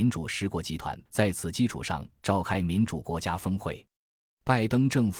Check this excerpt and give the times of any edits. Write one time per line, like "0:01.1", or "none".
0:01.1